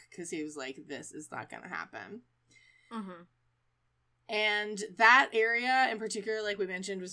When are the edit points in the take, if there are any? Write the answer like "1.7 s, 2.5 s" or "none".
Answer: none